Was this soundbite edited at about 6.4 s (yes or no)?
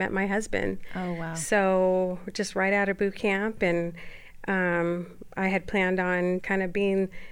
yes